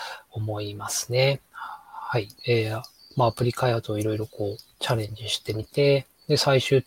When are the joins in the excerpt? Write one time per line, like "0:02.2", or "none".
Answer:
0:02.4